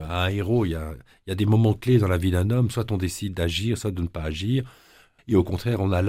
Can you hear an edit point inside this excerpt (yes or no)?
yes